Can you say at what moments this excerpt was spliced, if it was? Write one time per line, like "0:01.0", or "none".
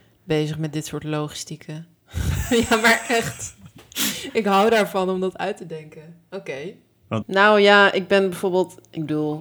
0:07.2

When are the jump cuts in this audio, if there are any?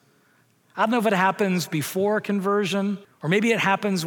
0:03.0

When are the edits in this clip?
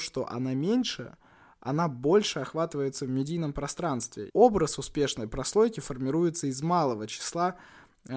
0:04.3

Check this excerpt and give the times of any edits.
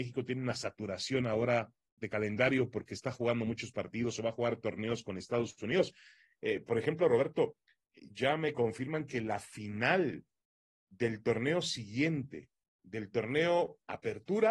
0:02.0

